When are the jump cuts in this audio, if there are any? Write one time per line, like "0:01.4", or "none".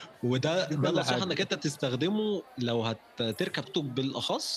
0:03.7

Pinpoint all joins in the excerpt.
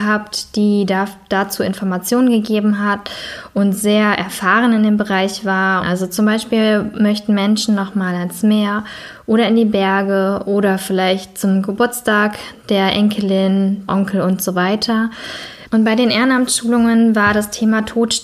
0:05.8
0:13.9
0:15.7

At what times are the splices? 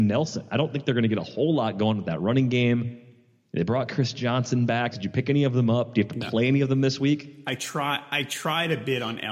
0:04.9

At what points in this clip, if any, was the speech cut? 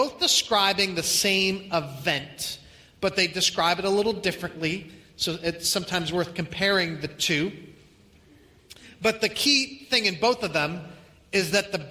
none

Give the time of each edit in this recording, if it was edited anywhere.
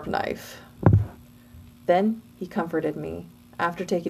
0:01.7

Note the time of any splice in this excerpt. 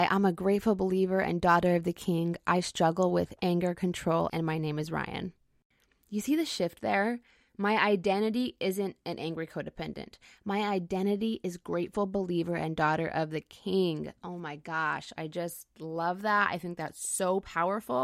0:04.3

